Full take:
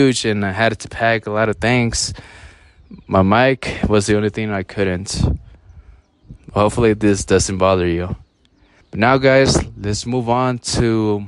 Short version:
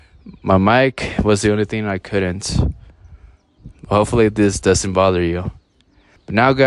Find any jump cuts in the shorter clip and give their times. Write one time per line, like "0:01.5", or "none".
none